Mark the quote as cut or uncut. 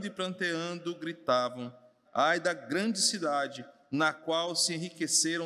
cut